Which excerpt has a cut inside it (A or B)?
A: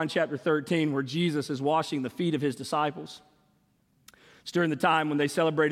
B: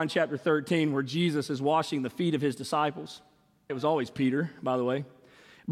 B